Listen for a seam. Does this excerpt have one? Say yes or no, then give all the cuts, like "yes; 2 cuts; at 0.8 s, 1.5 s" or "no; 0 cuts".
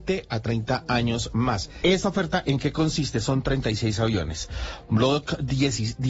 yes; 1 cut; at 1.8 s